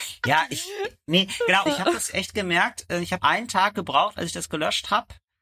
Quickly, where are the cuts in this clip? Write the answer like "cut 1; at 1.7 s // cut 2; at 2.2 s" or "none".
cut 1; at 1.7 s // cut 2; at 3.2 s